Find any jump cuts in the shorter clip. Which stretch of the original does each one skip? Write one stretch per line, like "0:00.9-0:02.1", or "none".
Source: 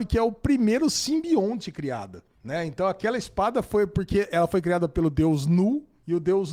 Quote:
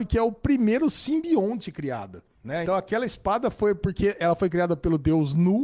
0:02.7-0:02.8